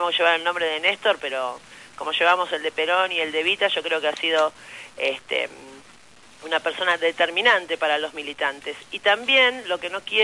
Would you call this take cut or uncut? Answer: uncut